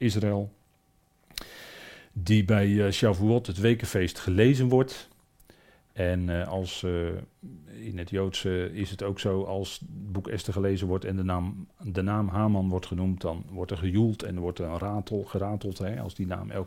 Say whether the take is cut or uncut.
uncut